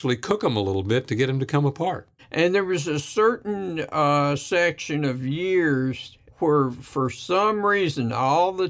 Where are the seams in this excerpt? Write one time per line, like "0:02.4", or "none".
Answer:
0:02.2